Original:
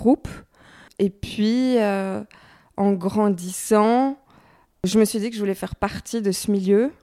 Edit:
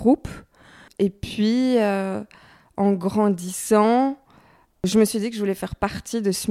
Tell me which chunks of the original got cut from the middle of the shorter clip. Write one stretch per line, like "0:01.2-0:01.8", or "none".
none